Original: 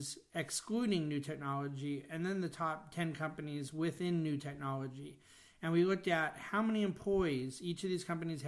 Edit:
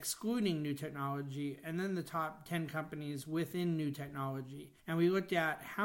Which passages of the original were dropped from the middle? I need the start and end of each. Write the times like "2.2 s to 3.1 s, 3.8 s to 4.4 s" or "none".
5.3 s to 5.5 s